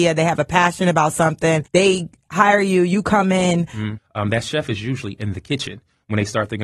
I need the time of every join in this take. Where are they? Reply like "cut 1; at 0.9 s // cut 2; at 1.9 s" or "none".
cut 1; at 4.0 s